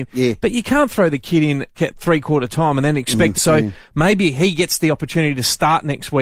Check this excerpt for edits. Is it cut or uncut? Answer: cut